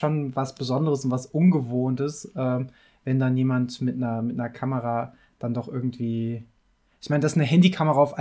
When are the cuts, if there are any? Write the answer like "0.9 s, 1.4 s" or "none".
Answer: none

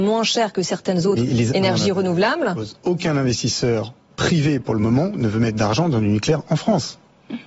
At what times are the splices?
2.8 s

